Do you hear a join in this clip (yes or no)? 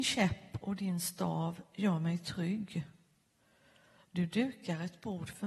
no